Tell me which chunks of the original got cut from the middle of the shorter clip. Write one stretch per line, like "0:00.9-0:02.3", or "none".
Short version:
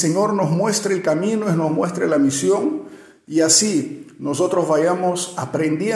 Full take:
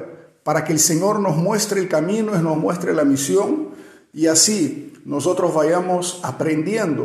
none